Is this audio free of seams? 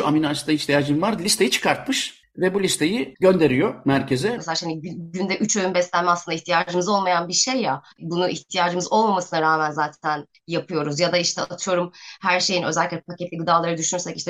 no; 1 cut; at 4.4 s

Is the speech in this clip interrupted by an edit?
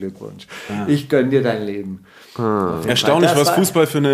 no; 0 cuts

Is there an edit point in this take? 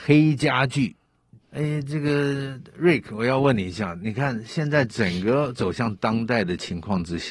yes; 1 cut; at 1.4 s

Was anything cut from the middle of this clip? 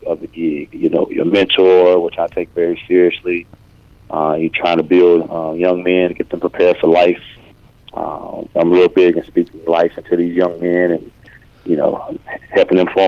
no; 0 cuts

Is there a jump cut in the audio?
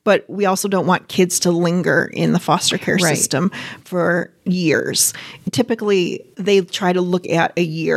yes; 1 cut; at 6.3 s

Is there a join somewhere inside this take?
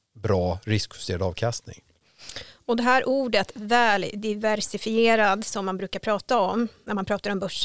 no; 0 cuts

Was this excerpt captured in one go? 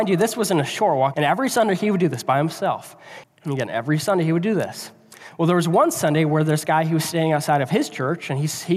no; 2 cuts; at 1.1 s, 3.2 s

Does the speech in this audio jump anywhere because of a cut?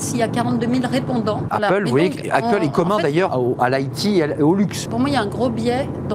yes; 3 cuts; at 1.5 s, 3.3 s, 4.9 s

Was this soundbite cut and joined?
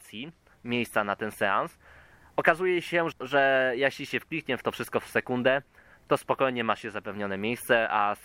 yes; 1 cut; at 3.1 s

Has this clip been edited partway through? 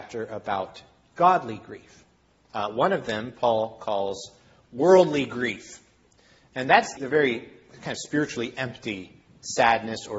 yes; 2 cuts; at 2.5 s, 7.0 s

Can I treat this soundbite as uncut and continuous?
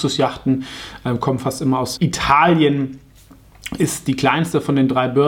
no; 1 cut; at 2.0 s

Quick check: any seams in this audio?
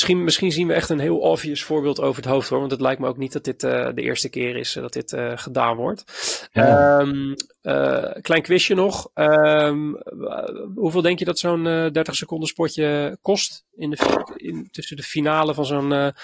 no; 0 cuts

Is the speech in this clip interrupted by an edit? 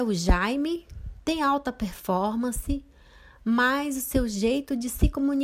yes; 1 cut; at 1.2 s

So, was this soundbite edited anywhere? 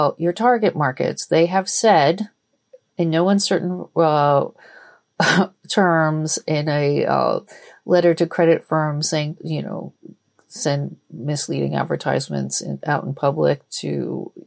yes; 1 cut; at 9.4 s

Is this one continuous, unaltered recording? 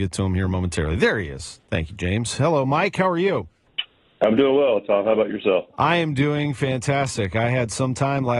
yes; 0 cuts

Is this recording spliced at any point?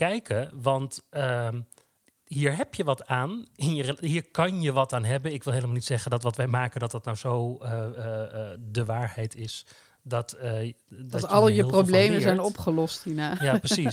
no; 0 cuts

